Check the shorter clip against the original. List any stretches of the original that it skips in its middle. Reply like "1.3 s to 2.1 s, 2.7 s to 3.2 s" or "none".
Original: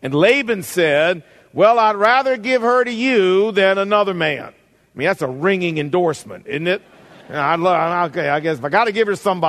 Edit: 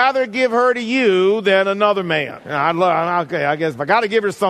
4.5 s to 7.2 s